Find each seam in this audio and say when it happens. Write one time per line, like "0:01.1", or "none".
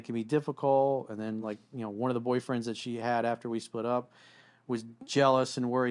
none